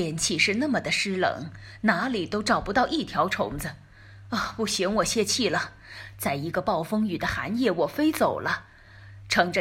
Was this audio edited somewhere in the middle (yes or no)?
no